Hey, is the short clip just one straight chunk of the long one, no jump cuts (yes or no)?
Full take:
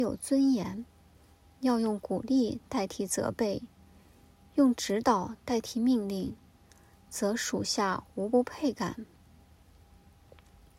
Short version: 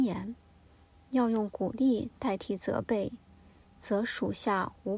no